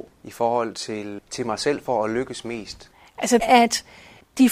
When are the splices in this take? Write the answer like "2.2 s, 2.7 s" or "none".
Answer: 1.2 s, 3.4 s